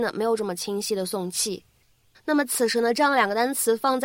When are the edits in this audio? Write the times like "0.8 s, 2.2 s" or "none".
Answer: 2.1 s